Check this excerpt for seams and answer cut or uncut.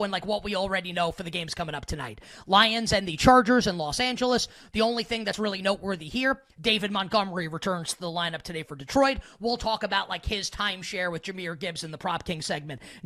uncut